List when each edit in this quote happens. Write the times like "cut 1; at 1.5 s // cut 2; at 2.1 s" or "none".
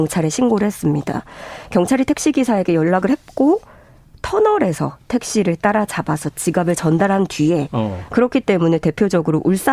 cut 1; at 8.1 s